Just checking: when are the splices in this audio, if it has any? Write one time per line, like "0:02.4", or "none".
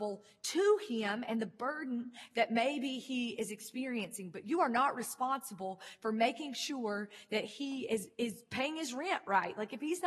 none